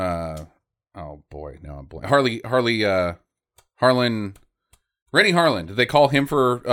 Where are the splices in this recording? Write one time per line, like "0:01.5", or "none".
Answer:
none